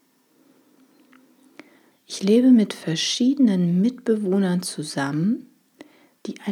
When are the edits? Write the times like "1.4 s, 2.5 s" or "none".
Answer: 1.9 s